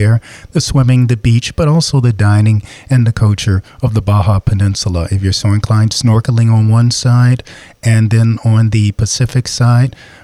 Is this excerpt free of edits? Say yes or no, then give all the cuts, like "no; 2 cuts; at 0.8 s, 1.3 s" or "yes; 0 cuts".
yes; 0 cuts